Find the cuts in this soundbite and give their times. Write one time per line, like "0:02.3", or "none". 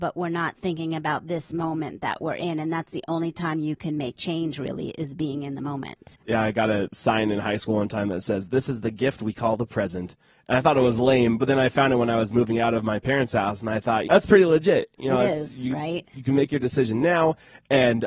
0:14.0